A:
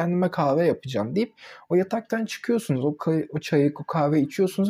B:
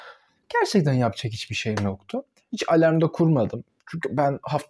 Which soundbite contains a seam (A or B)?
B